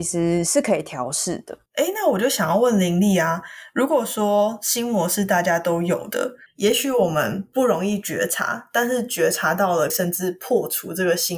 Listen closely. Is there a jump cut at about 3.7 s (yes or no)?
no